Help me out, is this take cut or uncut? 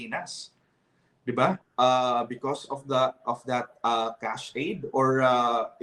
cut